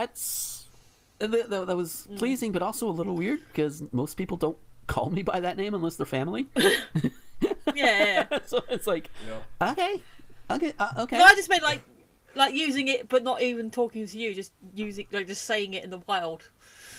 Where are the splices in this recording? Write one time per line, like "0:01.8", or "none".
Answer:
none